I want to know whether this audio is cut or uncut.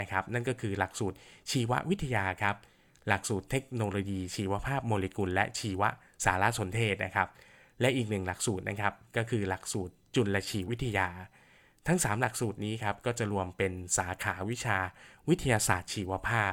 cut